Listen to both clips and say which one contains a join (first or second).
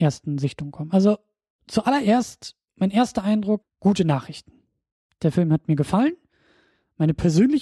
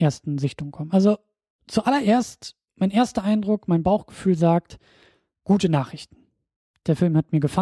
first